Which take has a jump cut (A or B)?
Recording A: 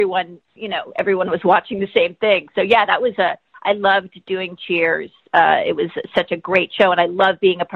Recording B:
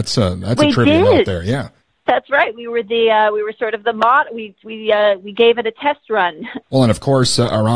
B